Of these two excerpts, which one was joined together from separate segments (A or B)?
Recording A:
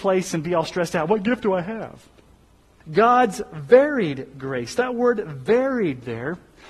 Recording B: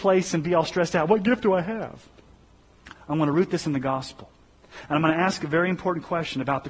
A